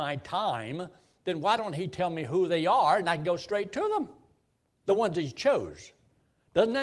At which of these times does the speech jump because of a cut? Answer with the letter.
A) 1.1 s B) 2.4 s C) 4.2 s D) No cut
D